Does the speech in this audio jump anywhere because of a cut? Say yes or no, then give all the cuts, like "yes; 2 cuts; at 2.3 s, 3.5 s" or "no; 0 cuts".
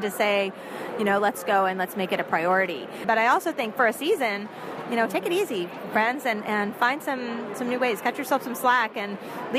yes; 1 cut; at 3.0 s